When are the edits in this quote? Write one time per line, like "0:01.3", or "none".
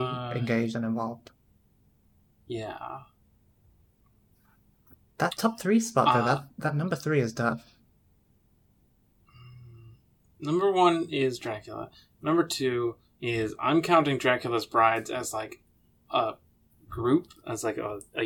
none

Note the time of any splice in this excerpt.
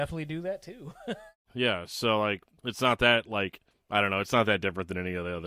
none

